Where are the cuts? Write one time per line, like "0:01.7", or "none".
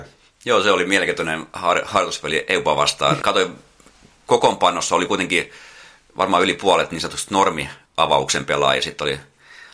0:03.2
0:07.9

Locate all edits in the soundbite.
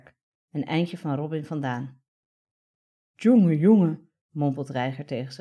0:04.2

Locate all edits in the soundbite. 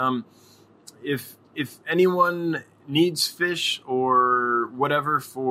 0:01.4

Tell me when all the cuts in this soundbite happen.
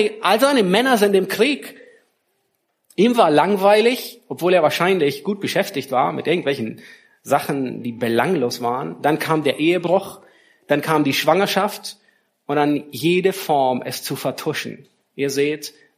none

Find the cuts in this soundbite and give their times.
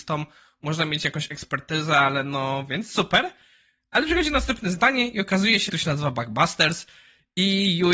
0:05.7

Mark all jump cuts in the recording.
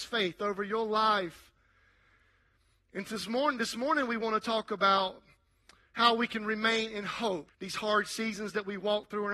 0:07.5

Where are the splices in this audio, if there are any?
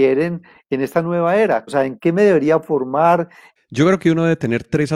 0:01.7
0:03.6

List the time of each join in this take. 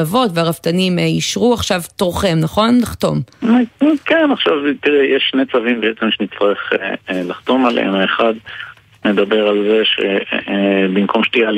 none

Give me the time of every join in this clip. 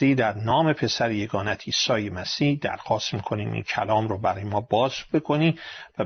none

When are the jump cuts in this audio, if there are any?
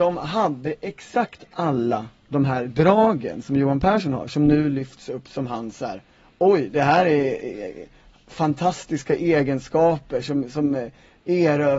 0:06.7

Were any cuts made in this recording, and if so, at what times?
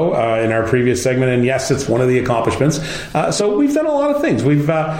none

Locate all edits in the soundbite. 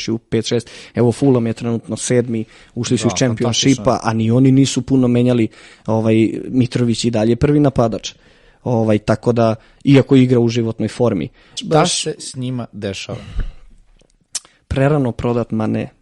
0:11.6

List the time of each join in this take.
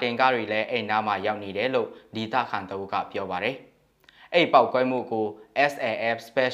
none

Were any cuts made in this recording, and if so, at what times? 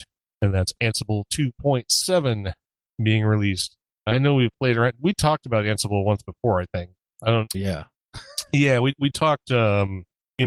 0:07.5

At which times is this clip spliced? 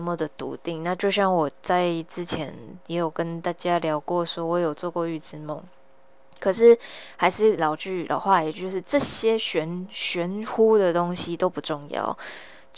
none

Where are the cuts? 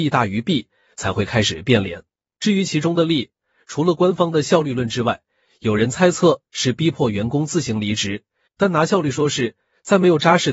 0:08.5

